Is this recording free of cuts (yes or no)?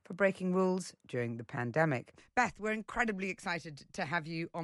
yes